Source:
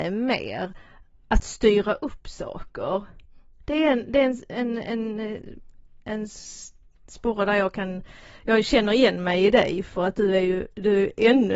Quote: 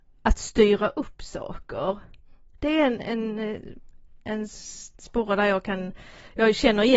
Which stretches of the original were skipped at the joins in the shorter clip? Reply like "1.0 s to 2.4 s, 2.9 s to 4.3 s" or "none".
4.0 s to 4.8 s, 6.7 s to 7.0 s

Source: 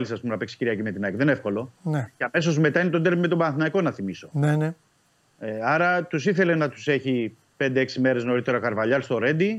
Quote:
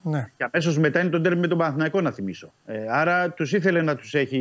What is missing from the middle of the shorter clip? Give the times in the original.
4.3 s to 5.2 s

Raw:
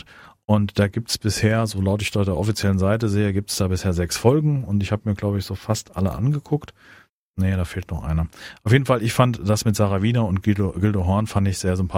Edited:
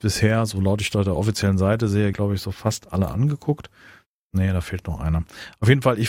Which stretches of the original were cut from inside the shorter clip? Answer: 3.3 s to 5.2 s

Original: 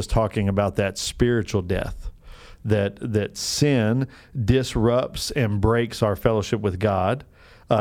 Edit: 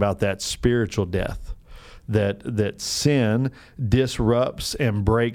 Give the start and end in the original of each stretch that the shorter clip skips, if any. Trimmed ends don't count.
none

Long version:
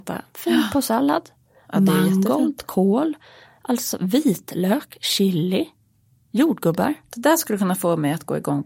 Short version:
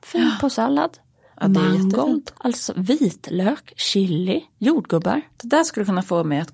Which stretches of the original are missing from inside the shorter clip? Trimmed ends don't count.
2.7 s to 3.6 s, 5.8 s to 6.2 s

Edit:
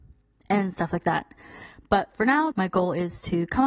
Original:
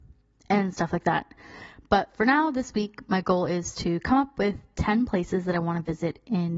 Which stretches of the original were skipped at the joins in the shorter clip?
2.5 s to 3.0 s

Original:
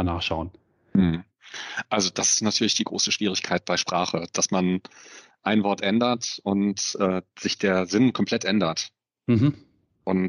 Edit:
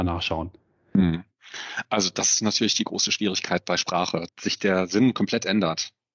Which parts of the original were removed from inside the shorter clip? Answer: 4.3 s to 7.3 s

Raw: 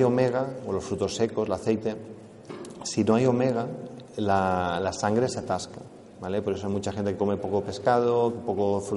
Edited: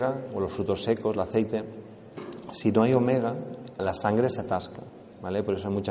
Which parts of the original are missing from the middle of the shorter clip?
4.1 s to 4.8 s

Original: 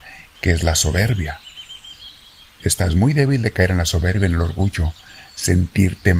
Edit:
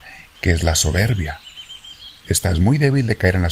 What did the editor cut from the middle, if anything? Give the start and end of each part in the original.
2.2 s to 2.5 s

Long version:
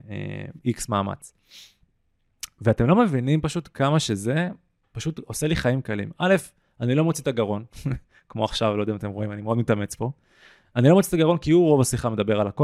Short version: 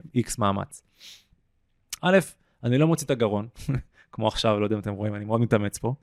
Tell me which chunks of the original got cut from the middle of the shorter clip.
2.5 s to 6.2 s

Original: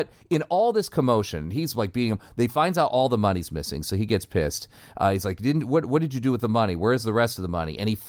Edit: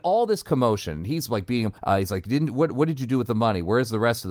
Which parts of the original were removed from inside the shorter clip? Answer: 2.2 s to 4.9 s

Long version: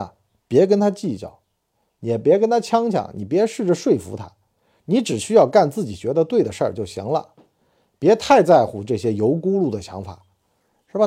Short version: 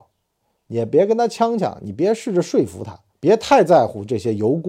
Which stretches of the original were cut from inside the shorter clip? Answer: 4.4 s to 7.9 s

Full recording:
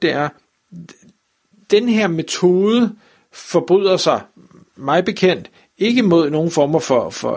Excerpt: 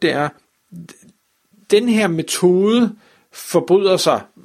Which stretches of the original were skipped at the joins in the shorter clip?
none

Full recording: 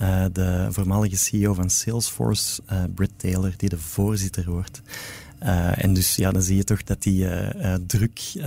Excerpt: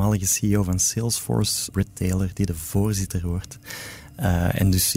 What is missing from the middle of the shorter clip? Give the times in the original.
2.6 s to 3.0 s

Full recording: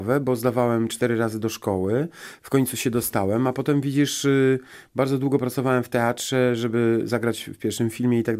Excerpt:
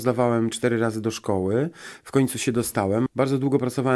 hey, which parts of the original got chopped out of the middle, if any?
3.4 s to 4.9 s

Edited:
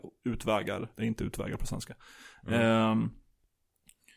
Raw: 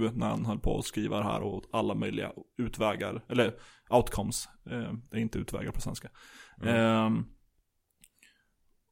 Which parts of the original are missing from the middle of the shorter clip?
3.3 s to 5.1 s

